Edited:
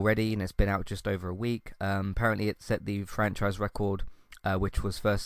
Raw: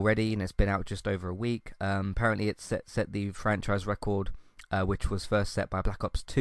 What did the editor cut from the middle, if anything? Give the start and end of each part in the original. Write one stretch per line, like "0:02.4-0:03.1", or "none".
0:02.6-0:02.8